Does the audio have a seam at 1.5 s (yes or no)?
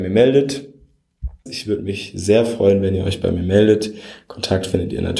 yes